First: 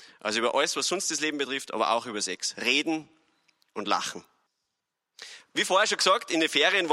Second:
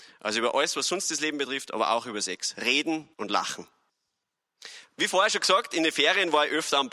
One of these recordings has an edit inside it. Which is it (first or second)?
second